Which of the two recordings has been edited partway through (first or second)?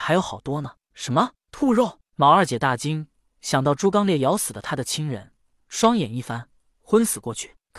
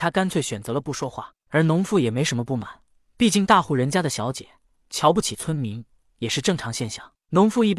first